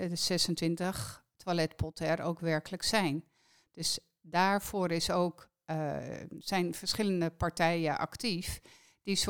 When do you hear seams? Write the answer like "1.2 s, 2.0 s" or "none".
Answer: none